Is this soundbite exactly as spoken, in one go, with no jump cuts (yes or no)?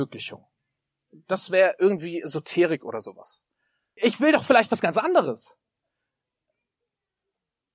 no